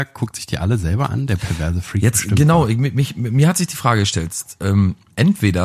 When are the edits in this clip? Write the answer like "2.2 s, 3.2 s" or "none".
none